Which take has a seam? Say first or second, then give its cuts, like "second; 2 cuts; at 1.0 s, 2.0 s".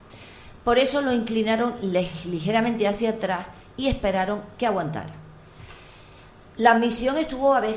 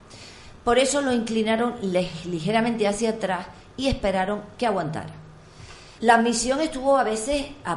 second; 1 cut; at 6.0 s